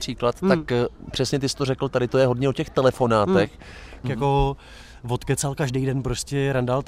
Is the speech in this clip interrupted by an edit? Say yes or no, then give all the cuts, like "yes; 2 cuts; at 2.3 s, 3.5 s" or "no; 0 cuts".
yes; 1 cut; at 4.0 s